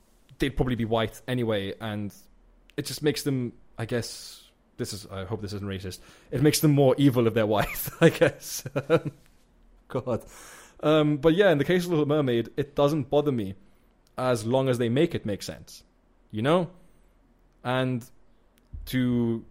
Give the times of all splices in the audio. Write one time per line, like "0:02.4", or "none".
none